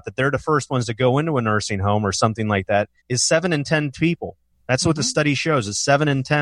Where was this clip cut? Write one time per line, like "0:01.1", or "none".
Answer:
0:03.0

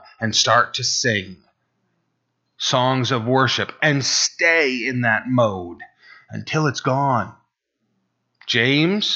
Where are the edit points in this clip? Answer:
none

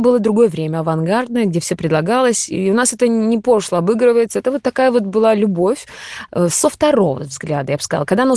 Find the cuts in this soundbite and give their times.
none

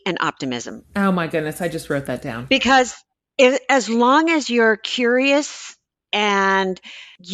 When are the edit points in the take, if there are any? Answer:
none

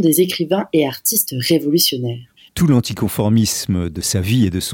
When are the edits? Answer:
0:02.5

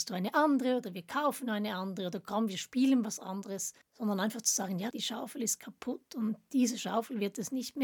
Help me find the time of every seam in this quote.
0:03.8
0:04.9

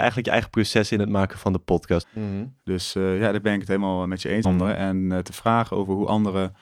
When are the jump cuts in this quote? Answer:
0:02.0
0:04.4

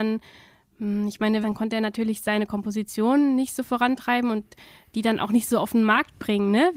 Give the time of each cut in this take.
0:01.4

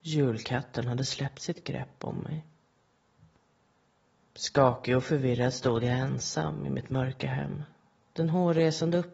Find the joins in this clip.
none

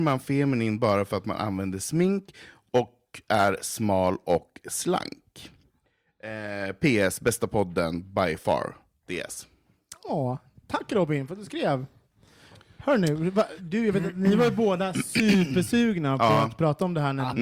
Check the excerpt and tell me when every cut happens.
0:13.6

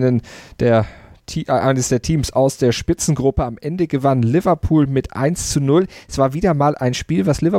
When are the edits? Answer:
none

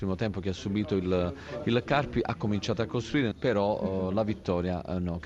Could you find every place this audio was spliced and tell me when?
0:03.3

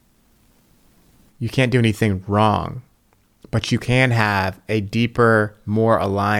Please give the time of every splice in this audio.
0:01.3

